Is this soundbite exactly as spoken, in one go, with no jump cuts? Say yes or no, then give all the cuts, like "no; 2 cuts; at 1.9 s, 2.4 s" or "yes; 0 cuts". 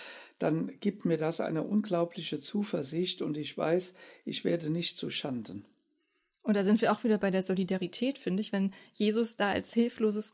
no; 1 cut; at 8.5 s